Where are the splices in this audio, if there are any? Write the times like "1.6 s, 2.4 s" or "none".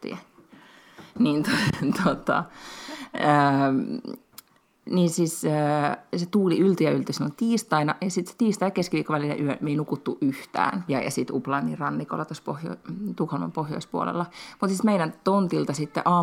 10.9 s